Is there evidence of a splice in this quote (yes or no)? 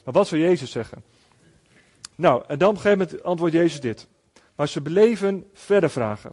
yes